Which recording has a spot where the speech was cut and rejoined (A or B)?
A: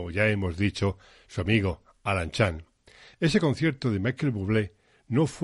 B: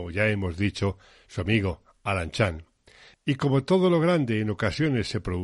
B